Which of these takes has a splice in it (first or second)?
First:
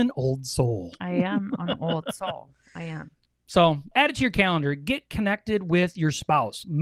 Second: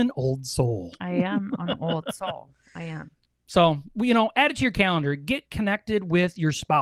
first